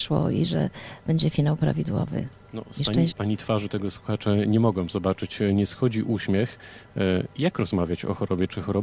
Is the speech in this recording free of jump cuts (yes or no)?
no